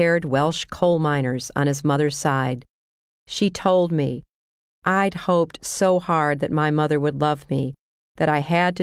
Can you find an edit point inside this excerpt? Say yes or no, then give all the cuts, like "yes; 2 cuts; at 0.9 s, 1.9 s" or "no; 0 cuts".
yes; 1 cut; at 3.2 s